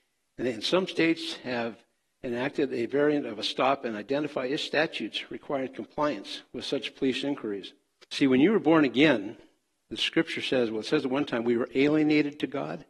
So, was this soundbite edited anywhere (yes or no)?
yes